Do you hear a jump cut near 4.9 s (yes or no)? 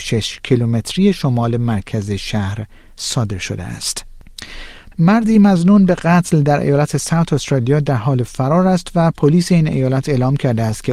yes